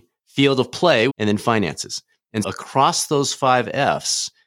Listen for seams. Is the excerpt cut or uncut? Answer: cut